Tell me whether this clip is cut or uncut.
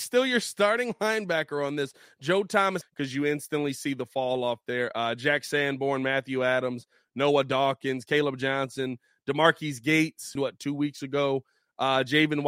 cut